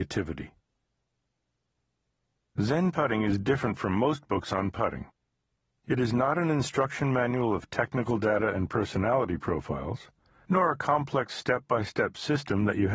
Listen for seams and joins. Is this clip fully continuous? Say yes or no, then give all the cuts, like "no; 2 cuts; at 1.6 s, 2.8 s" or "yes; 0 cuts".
yes; 0 cuts